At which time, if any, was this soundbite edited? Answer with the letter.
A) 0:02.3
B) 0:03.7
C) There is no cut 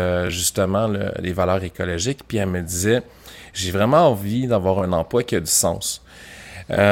C